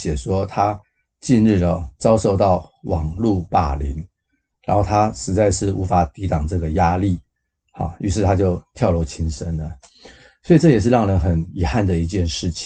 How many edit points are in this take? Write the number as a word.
zero